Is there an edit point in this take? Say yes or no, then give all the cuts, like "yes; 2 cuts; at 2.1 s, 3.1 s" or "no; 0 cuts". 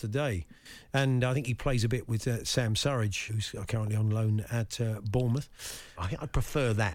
yes; 2 cuts; at 3.3 s, 6.0 s